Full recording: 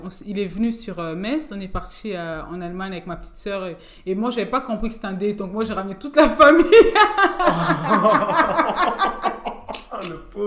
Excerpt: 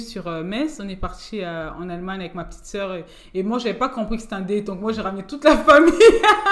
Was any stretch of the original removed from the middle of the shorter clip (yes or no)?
no